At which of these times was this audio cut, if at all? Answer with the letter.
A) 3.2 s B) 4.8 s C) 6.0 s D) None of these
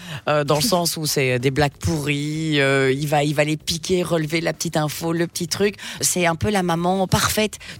C